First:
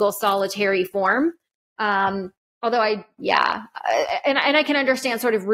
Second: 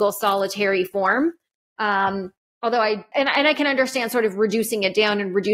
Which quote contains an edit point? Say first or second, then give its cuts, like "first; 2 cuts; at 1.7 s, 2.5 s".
second; 1 cut; at 3.1 s